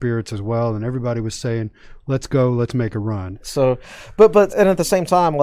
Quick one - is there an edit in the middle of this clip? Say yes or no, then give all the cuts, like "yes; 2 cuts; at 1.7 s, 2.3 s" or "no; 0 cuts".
yes; 2 cuts; at 3.4 s, 4.5 s